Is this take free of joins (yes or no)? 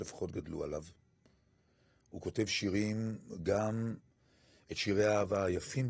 yes